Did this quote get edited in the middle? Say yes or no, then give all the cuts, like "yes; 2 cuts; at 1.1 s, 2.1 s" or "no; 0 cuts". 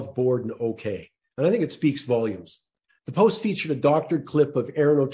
yes; 1 cut; at 2.9 s